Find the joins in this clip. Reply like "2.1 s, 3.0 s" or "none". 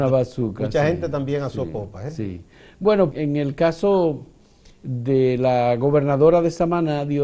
3.1 s